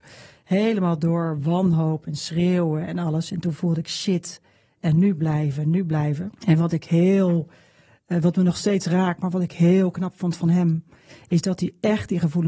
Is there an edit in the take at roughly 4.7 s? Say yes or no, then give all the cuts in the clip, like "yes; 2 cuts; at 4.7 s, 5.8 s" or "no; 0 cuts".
no; 1 cut; at 6.4 s